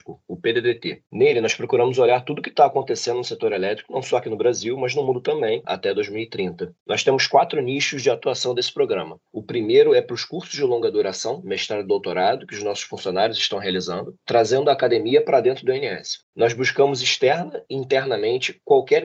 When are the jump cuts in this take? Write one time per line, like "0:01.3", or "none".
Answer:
0:05.6
0:06.8
0:16.2